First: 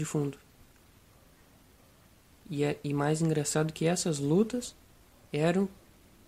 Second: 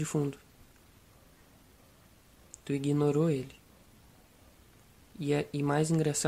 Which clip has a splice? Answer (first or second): first